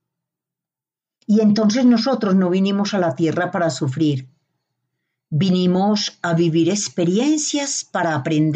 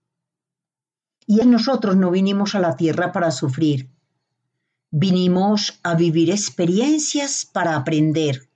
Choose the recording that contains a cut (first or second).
second